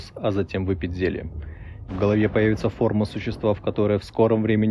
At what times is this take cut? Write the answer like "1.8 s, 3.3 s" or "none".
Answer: 1.9 s